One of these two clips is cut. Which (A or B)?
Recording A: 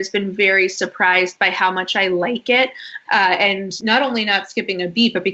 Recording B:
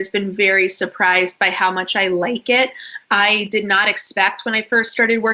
A